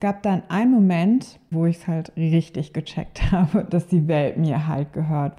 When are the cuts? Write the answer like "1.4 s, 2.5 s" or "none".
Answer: 1.5 s, 3.7 s